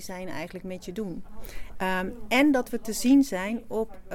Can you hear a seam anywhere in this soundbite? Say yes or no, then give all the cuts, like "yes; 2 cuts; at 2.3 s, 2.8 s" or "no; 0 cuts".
yes; 1 cut; at 1.7 s